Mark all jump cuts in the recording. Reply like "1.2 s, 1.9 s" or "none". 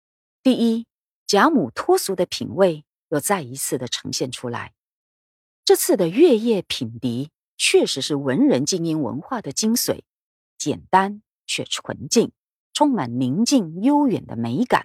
none

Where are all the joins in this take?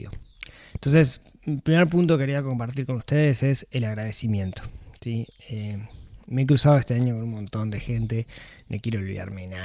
none

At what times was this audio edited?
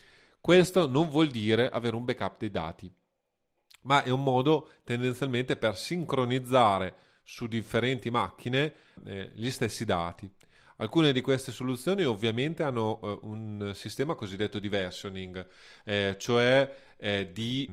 none

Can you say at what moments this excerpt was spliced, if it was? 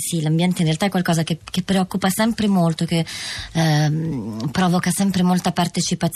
none

